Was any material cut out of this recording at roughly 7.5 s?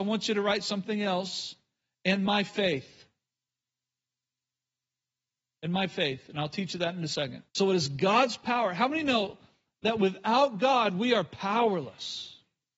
yes; 1 cut; at 7.5 s

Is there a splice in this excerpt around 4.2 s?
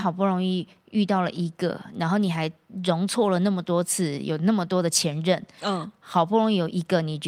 no; 0 cuts

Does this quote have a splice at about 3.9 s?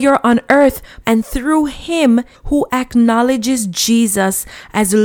no; 2 cuts; at 1.0 s, 2.3 s

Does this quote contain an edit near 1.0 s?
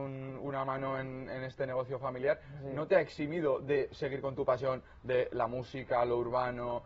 no; 0 cuts

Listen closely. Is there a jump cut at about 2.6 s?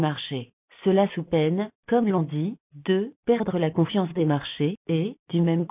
no; 0 cuts

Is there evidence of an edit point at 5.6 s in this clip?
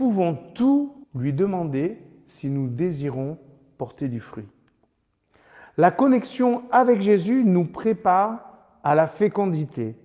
no; 1 cut; at 1.0 s

